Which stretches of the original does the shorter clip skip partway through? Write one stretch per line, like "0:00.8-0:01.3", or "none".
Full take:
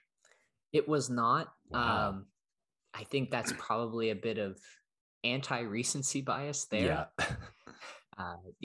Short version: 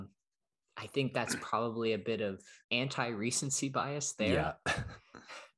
0:04.8-0:05.1